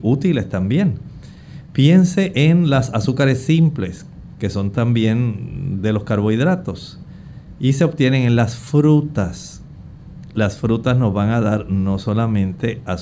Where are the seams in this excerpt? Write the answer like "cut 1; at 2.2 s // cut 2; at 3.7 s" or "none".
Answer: none